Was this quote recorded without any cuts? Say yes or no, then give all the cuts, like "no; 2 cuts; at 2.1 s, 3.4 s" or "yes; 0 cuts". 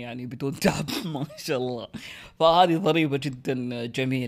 yes; 0 cuts